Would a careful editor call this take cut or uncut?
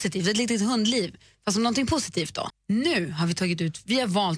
cut